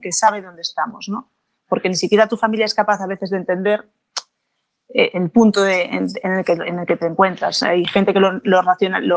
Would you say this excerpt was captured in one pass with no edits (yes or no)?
yes